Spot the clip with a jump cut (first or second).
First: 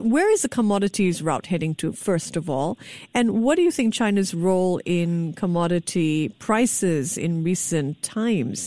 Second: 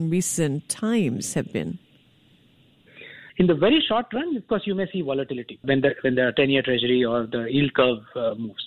second